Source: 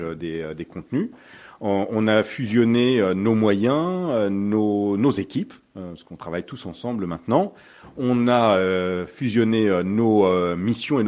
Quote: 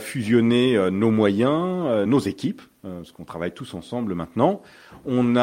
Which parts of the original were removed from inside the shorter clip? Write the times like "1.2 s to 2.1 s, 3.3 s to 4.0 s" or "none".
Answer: 4.3 s to 5.0 s